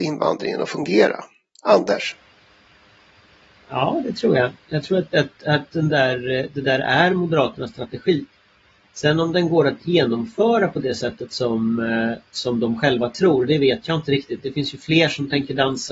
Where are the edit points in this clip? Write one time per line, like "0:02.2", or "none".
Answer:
0:05.1